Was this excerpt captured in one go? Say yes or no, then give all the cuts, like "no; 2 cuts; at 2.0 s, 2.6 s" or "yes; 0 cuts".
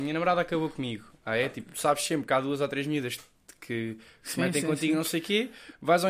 yes; 0 cuts